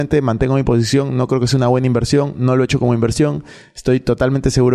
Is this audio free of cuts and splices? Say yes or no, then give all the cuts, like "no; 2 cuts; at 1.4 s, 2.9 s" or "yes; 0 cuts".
yes; 0 cuts